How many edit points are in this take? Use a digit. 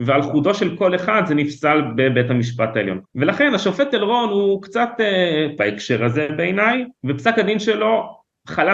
3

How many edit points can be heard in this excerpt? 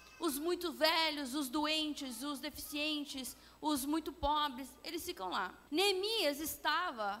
1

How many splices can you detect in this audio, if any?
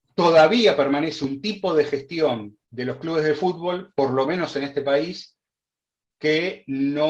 1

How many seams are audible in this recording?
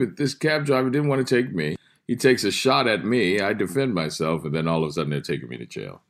0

